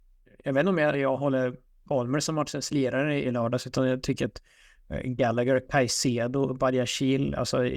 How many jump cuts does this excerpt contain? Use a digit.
0